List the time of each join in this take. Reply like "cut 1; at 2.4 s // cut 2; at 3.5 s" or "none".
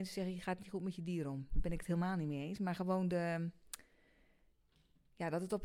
none